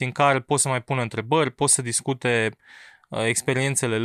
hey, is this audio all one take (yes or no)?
yes